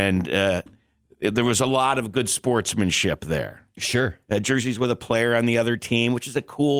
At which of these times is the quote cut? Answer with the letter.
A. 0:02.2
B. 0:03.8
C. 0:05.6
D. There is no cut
B